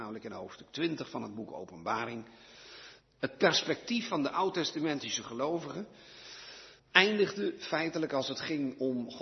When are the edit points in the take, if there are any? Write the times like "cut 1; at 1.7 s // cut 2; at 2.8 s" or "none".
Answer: cut 1; at 3.0 s // cut 2; at 6.8 s